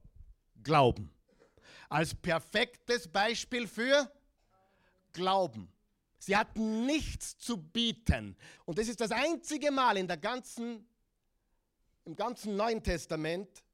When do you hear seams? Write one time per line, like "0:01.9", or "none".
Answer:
0:06.2
0:08.6